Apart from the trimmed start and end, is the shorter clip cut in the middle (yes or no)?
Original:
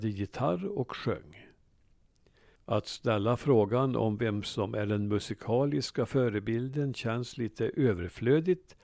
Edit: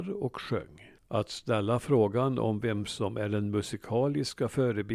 yes